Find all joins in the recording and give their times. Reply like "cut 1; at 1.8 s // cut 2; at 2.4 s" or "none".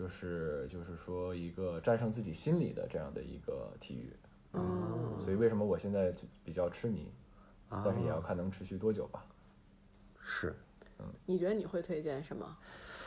none